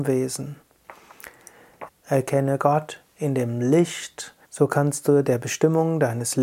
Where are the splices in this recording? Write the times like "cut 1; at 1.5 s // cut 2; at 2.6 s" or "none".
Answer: cut 1; at 1.9 s // cut 2; at 4.4 s